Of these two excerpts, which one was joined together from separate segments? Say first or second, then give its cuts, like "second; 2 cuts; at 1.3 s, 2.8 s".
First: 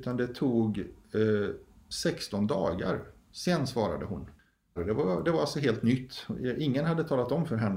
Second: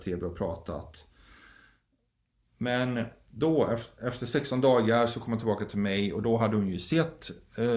first; 1 cut; at 4.8 s